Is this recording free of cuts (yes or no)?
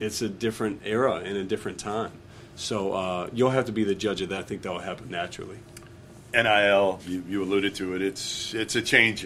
no